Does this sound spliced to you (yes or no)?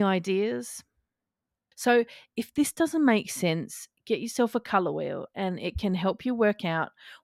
yes